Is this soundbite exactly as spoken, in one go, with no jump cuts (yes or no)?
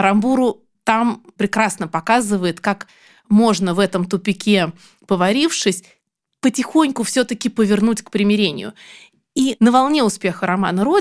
yes